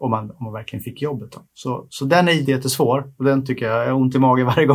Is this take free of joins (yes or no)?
no